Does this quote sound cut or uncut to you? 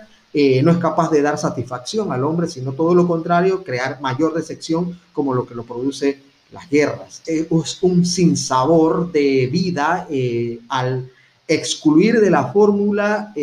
cut